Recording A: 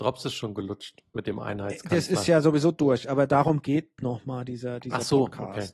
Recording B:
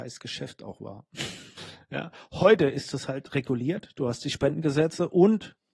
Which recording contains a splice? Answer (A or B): B